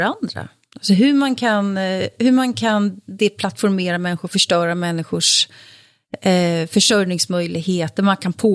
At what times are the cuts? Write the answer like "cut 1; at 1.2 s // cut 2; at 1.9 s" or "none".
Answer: none